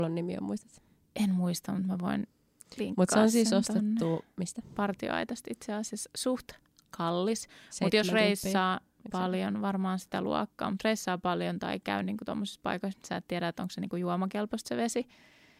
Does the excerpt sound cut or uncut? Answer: uncut